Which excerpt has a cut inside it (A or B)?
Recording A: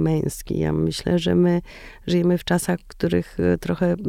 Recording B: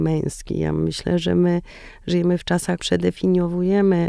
B